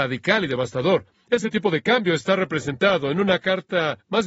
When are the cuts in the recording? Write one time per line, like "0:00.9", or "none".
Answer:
none

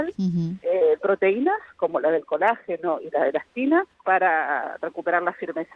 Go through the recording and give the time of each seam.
0:01.0
0:03.9

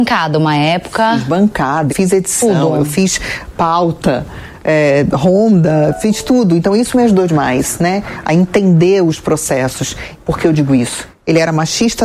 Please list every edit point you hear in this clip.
0:01.9
0:10.2

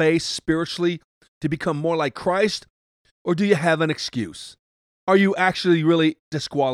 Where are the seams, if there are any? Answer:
none

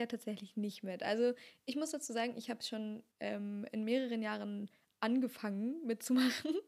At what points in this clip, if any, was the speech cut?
0:03.1

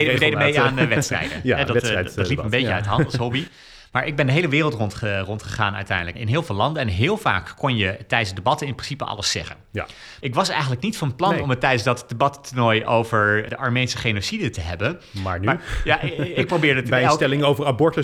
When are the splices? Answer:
0:06.1
0:10.2

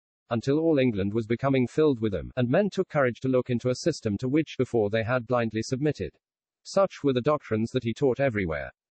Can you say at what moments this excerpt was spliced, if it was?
0:02.3
0:06.5

